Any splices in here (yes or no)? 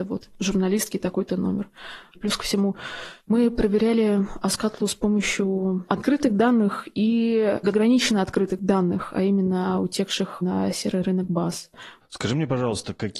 yes